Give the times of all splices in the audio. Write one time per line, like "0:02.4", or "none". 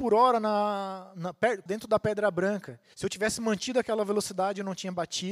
0:01.7
0:02.9